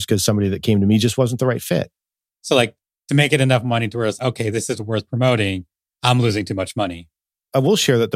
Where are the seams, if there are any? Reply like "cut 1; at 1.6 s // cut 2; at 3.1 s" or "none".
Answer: cut 1; at 2.3 s // cut 2; at 4.2 s